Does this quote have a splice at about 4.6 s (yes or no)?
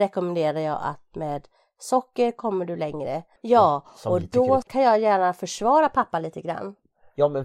no